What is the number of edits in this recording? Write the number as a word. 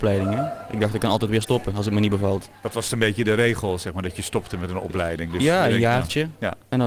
zero